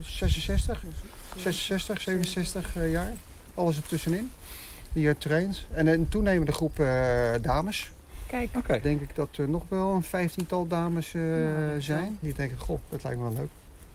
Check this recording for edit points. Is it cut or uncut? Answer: cut